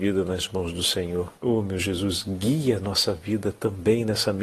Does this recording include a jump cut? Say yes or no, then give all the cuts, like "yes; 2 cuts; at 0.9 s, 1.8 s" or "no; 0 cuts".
yes; 1 cut; at 1.4 s